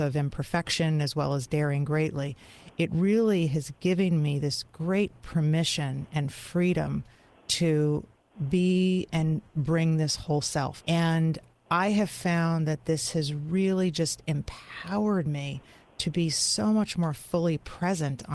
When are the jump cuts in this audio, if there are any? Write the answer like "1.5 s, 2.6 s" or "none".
10.8 s